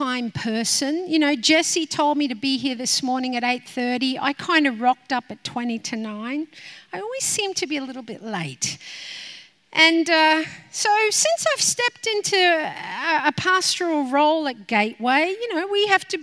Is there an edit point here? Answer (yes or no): no